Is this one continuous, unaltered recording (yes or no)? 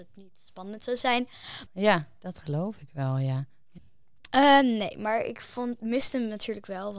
no